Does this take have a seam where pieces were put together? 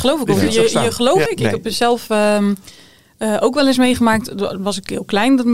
yes; 1 cut; at 1.3 s

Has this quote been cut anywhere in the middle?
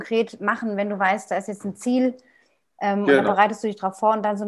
no; 0 cuts

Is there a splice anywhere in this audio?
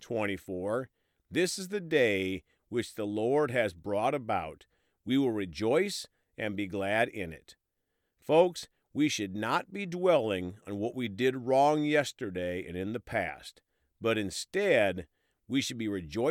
no; 0 cuts

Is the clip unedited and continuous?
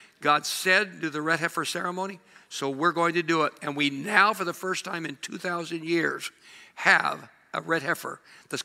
yes; 0 cuts

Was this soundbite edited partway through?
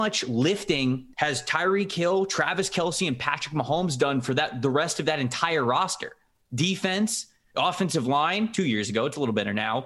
no; 0 cuts

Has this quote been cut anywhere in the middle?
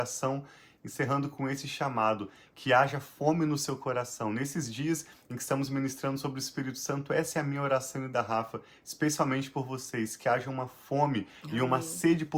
no; 0 cuts

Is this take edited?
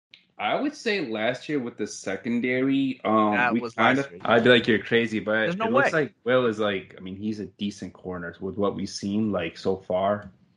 yes; 1 cut; at 4.2 s

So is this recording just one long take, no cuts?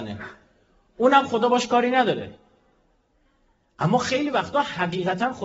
yes; 0 cuts

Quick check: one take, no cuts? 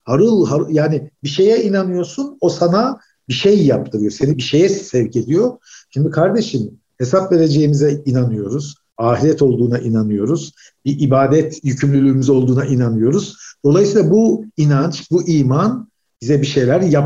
no; 1 cut; at 4.3 s

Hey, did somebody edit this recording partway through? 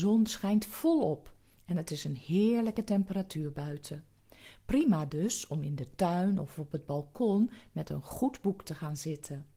no; 0 cuts

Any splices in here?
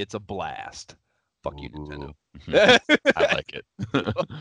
no; 0 cuts

